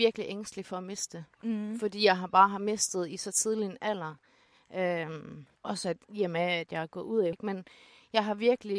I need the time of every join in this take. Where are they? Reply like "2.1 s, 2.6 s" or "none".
5.6 s, 7.3 s